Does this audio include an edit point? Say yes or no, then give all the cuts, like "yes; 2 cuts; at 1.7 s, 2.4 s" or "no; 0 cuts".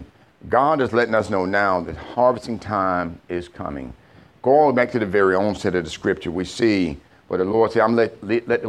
no; 0 cuts